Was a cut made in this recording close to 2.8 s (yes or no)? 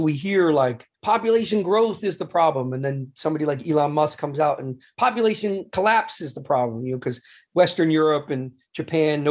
no